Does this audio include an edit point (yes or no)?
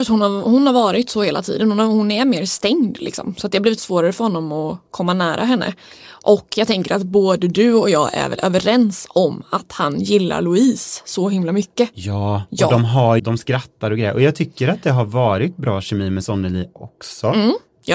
yes